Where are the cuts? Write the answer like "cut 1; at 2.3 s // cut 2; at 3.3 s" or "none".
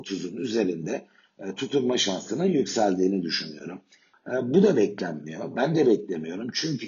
cut 1; at 4.1 s